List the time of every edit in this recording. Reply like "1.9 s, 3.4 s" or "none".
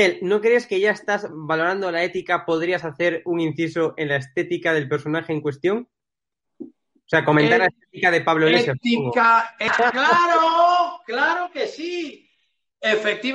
9.7 s